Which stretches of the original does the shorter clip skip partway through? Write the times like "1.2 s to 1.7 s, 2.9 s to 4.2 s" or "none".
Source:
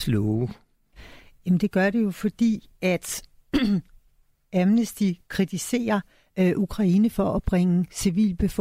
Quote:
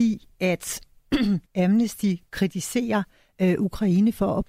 3.9 s to 4.4 s